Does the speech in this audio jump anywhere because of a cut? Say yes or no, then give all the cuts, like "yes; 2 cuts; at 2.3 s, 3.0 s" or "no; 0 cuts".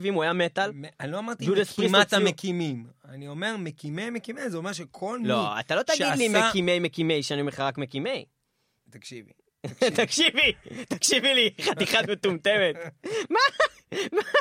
no; 0 cuts